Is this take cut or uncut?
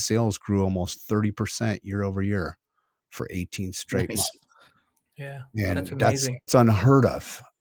cut